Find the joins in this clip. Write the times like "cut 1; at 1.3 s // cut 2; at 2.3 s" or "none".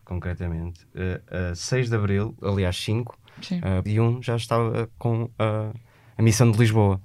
cut 1; at 2.4 s // cut 2; at 3.9 s